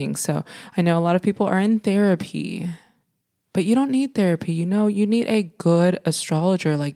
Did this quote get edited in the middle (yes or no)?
no